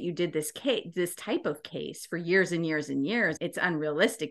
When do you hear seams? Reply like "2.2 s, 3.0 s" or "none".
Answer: 3.4 s